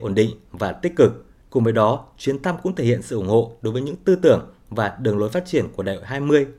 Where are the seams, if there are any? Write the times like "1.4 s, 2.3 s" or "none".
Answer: 1.4 s